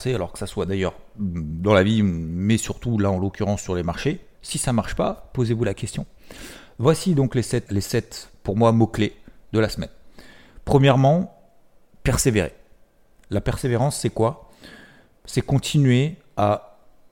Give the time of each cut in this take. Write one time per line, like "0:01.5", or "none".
0:04.3
0:07.7

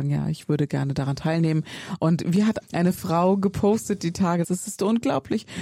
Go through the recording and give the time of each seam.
0:02.6
0:04.4

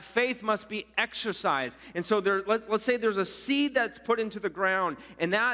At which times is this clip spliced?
none

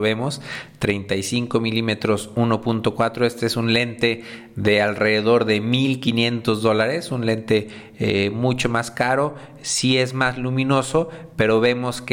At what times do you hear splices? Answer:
none

